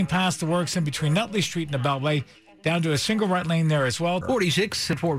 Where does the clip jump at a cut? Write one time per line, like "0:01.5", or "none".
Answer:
0:04.2